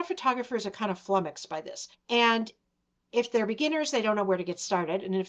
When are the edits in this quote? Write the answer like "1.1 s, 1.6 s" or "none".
1.9 s